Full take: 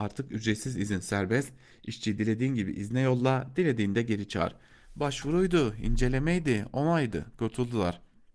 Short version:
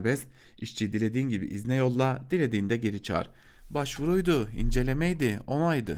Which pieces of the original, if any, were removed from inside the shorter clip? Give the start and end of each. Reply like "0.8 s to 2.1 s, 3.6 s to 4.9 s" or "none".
none